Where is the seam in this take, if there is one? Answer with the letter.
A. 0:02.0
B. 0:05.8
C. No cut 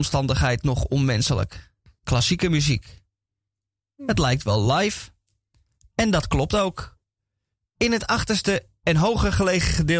A